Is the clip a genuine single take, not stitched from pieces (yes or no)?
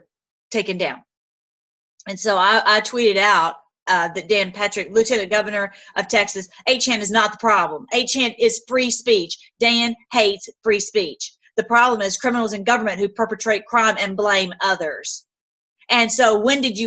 yes